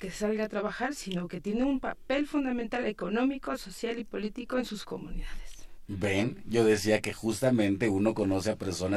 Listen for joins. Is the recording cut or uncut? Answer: uncut